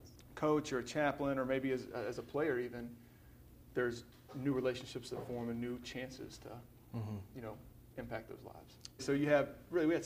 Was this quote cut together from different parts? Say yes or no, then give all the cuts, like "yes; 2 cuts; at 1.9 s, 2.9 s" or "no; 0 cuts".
yes; 1 cut; at 9.0 s